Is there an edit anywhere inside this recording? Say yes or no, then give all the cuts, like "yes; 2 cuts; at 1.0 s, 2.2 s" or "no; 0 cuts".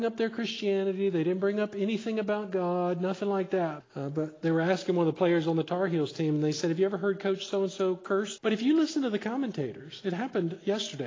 yes; 2 cuts; at 3.8 s, 8.4 s